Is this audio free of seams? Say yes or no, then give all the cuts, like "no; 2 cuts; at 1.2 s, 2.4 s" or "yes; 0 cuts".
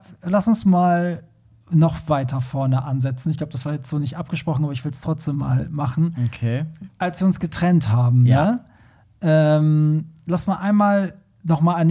yes; 0 cuts